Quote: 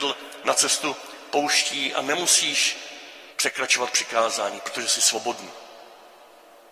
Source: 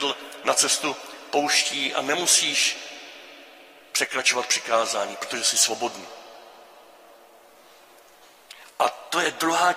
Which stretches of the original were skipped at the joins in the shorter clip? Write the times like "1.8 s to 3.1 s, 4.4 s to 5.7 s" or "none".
3.3 s to 3.9 s